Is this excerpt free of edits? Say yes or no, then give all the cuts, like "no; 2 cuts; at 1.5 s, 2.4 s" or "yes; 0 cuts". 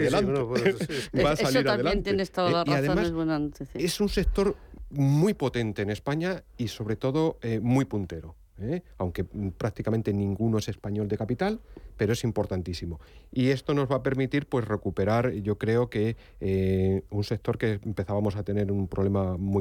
yes; 0 cuts